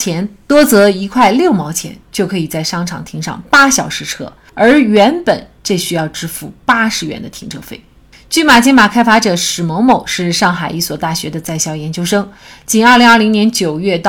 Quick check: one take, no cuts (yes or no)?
yes